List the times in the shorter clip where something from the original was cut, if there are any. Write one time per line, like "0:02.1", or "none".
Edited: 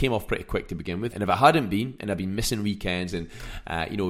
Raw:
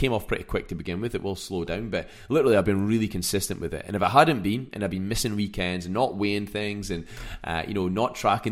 0:01.1
0:03.1